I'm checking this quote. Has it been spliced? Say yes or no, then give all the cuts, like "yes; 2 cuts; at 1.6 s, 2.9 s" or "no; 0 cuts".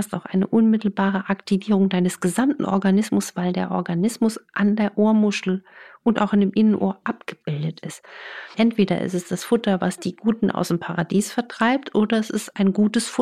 yes; 1 cut; at 8.5 s